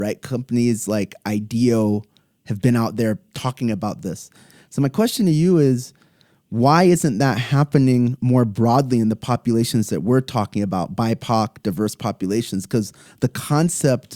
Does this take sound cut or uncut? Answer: uncut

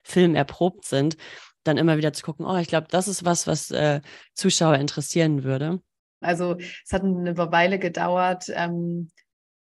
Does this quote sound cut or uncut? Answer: cut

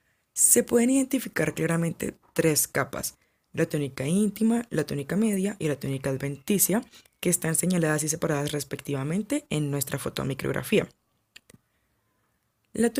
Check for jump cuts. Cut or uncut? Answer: uncut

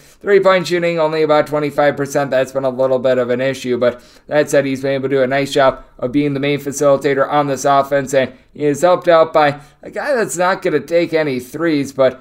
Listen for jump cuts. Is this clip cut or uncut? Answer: uncut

